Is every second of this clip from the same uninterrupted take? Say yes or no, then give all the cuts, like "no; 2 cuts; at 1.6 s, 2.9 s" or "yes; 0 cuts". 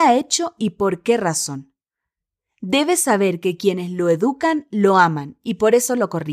yes; 0 cuts